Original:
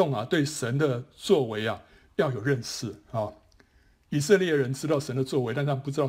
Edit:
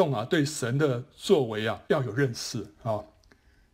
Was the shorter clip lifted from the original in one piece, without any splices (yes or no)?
no